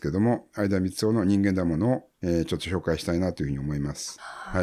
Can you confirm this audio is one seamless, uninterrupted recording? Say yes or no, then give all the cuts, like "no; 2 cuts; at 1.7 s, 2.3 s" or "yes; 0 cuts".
no; 1 cut; at 2.1 s